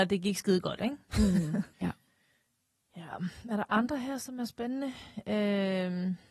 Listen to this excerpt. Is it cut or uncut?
cut